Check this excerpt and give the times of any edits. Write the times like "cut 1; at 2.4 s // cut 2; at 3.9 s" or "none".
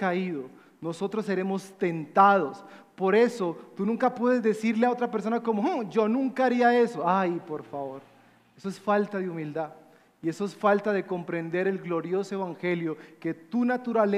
none

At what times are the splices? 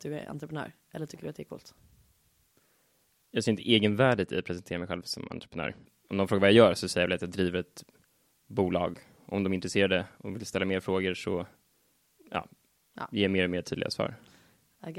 none

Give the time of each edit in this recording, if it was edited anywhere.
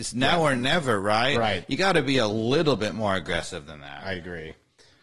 none

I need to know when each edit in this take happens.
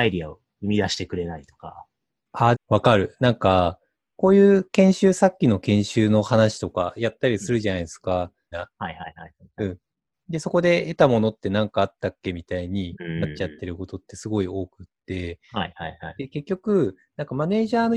cut 1; at 2.5 s // cut 2; at 8.5 s

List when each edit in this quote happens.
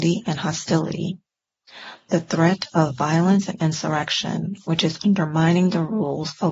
none

